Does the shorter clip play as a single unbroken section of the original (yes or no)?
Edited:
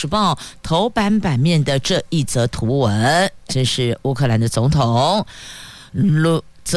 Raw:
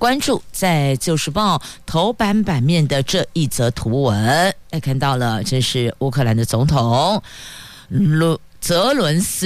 no